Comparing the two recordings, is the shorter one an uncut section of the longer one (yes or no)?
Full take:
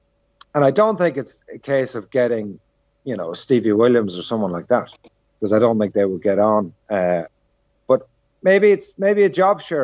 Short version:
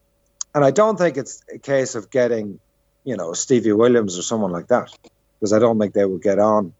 yes